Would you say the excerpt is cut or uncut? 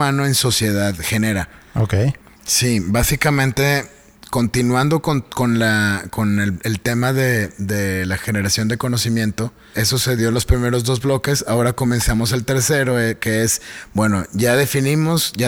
cut